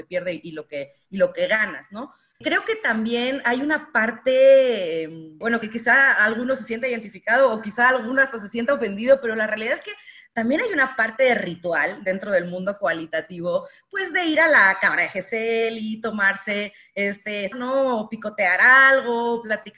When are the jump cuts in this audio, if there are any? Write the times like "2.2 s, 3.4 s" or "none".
17.5 s